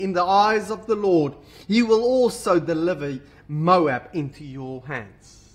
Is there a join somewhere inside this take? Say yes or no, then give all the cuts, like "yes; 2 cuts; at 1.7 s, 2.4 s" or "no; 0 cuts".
no; 0 cuts